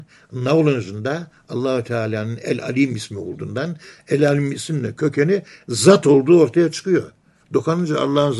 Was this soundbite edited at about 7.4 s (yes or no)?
yes